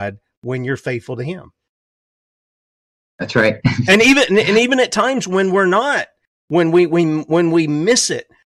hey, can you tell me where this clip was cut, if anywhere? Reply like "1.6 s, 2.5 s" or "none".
none